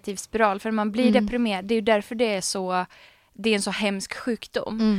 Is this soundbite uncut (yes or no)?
yes